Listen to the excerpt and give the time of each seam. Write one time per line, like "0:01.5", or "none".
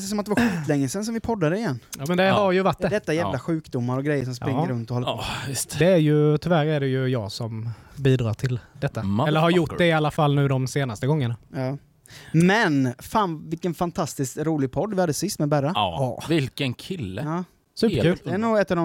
none